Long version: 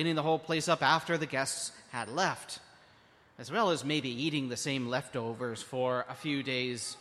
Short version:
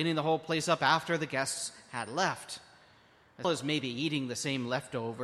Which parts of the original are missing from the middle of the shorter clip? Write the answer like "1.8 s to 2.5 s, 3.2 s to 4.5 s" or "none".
3.4 s to 3.7 s